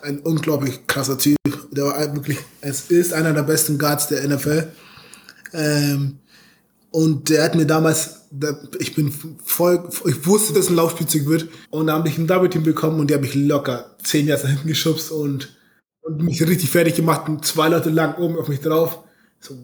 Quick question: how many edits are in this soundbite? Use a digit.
2